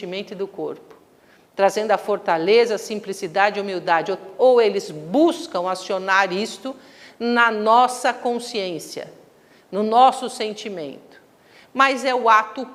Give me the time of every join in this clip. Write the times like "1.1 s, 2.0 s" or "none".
none